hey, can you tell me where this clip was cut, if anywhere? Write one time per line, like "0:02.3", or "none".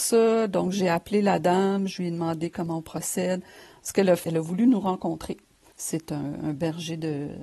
0:04.2
0:05.7